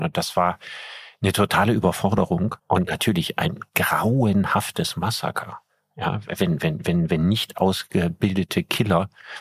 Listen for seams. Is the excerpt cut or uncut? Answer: cut